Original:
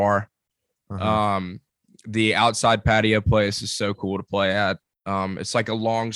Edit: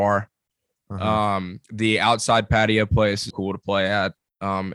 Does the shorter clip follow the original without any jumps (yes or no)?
no